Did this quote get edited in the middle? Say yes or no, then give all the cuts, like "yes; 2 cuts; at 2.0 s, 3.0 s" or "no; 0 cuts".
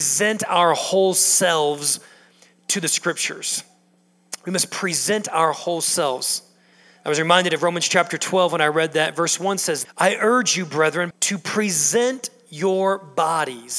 yes; 2 cuts; at 9.8 s, 11.1 s